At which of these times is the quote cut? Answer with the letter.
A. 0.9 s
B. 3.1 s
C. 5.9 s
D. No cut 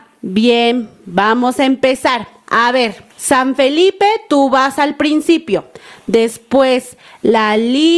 B